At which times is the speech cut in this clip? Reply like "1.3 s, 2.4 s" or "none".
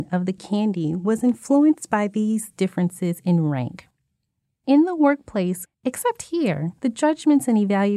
5.6 s